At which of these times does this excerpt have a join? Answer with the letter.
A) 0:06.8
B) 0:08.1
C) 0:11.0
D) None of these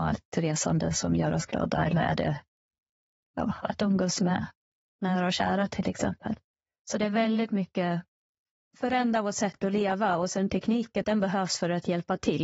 C